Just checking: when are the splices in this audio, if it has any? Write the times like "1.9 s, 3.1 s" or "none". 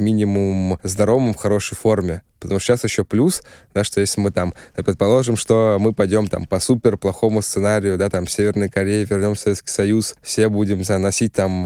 none